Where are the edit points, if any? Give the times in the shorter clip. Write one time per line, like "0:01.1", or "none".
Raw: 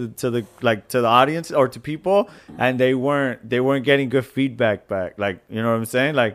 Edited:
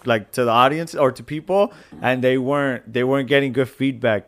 none